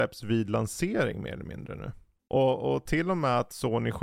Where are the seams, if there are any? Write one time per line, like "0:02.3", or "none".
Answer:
0:02.2